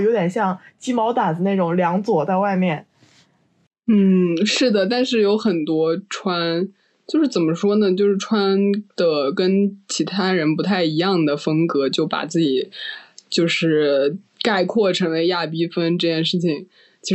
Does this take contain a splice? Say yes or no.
no